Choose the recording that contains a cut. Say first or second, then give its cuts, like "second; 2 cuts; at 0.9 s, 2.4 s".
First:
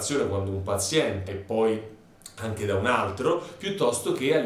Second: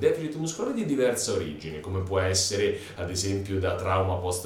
first; 1 cut; at 1.3 s